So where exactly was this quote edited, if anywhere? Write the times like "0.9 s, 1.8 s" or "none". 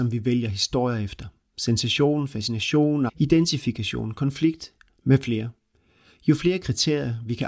3.1 s